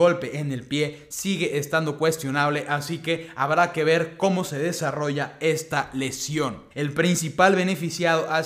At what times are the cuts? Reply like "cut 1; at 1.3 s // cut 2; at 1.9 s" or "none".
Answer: cut 1; at 6.7 s